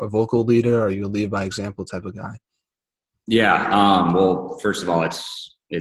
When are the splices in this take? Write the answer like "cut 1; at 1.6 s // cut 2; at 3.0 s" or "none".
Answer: none